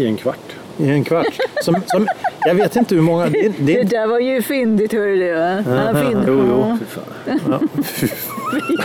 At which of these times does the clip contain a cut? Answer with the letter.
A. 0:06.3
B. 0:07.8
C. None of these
A